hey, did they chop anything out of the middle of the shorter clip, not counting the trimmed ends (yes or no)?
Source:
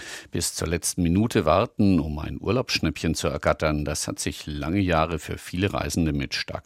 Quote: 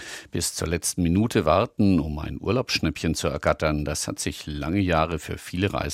no